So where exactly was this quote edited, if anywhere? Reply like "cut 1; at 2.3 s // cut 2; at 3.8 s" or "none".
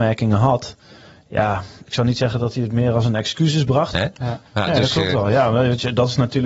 cut 1; at 3.9 s